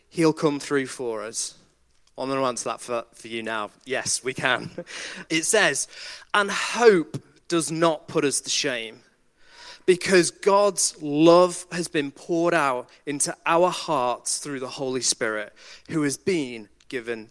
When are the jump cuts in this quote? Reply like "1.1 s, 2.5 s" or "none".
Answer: 5.3 s

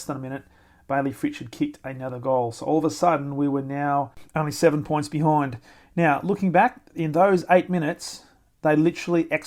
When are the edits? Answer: none

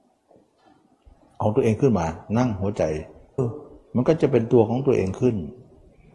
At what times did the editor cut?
3.4 s

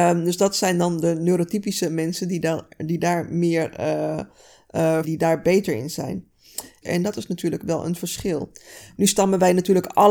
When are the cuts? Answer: 5.0 s, 6.8 s

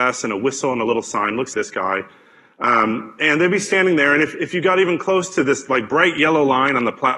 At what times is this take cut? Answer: 1.5 s

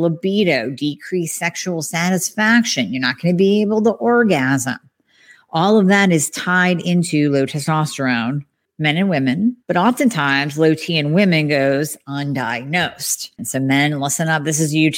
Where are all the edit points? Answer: 9.6 s, 13.4 s

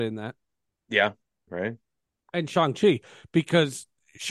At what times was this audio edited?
1.5 s

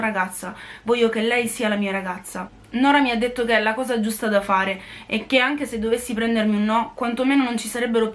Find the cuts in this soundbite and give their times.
none

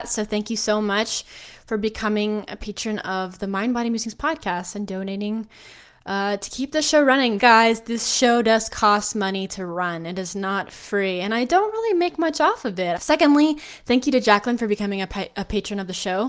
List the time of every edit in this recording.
7.4 s, 13.0 s

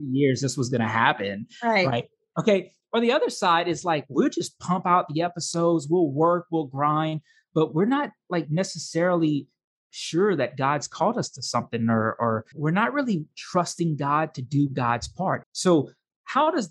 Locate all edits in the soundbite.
12.5 s, 15.4 s

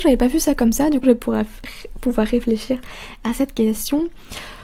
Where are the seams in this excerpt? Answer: 1.0 s

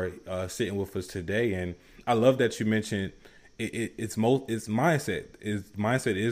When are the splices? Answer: none

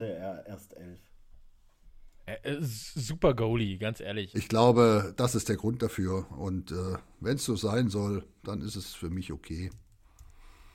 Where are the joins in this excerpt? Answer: 4.3 s

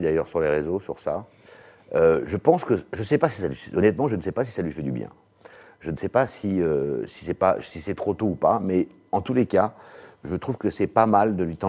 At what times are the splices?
none

